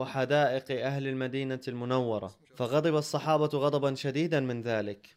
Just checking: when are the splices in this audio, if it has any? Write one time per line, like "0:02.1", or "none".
0:02.4

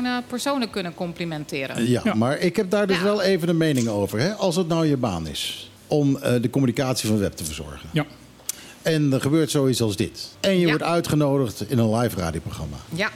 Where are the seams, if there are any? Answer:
0:05.8
0:10.3

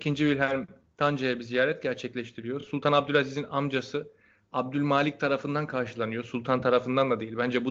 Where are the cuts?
none

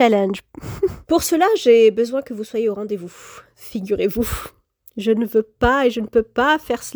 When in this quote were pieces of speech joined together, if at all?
0:01.0

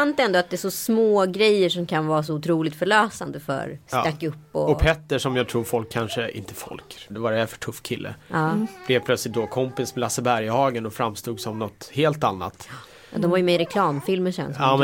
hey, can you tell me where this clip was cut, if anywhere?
0:03.8
0:07.1

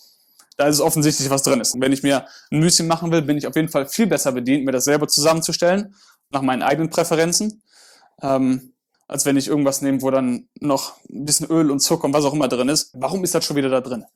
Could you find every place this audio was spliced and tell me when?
0:01.7
0:08.9
0:12.9

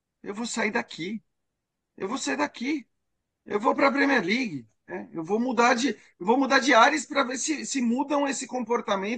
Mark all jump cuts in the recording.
none

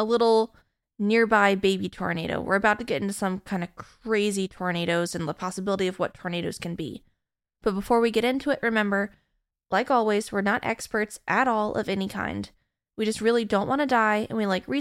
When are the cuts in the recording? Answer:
none

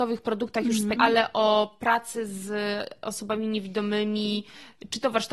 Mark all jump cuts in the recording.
0:01.0

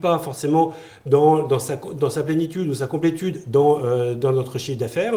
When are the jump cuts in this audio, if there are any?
none

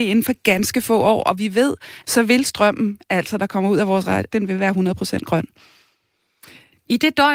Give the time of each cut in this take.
0:02.0
0:04.3

